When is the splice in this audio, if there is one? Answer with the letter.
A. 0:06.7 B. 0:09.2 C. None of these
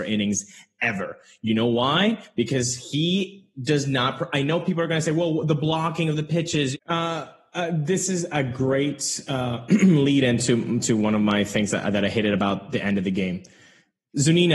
A